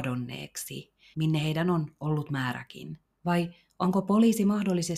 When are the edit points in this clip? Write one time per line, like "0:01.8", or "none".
0:01.1
0:03.1